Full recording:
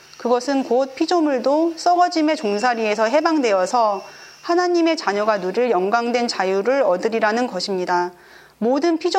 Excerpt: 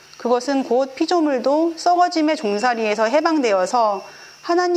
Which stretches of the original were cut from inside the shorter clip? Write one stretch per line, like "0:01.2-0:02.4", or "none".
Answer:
none